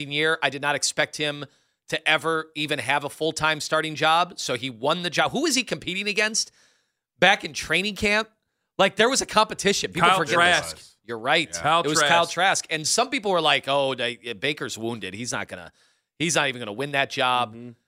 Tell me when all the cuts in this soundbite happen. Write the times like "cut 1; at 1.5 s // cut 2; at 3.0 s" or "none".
none